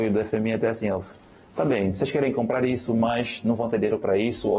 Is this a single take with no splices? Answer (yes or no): yes